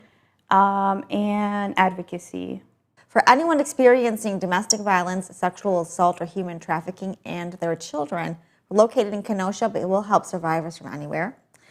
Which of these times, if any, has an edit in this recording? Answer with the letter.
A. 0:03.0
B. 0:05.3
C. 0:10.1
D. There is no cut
A